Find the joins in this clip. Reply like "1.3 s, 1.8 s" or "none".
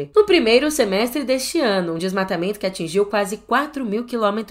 none